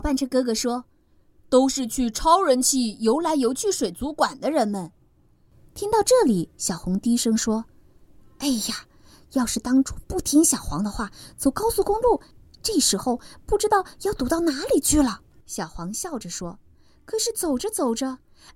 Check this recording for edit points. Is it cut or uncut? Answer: cut